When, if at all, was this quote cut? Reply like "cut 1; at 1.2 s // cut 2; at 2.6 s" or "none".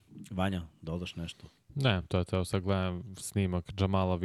none